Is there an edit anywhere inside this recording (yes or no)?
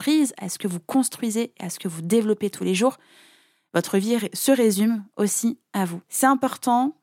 no